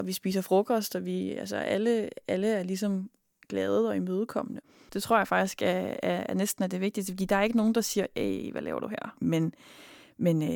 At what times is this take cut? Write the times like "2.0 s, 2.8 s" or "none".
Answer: 4.9 s, 9.2 s